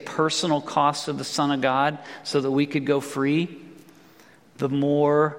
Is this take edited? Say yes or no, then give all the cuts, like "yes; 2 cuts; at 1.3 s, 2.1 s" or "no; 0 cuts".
no; 0 cuts